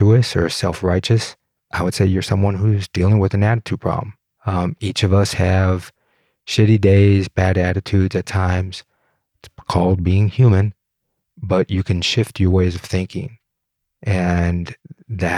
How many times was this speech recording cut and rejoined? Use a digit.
2